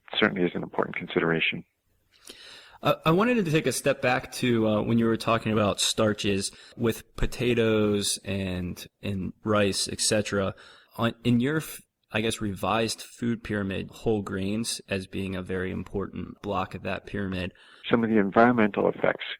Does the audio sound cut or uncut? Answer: cut